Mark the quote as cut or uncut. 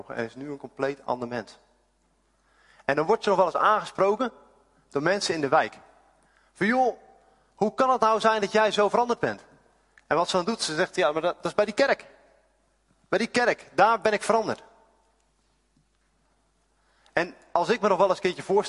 uncut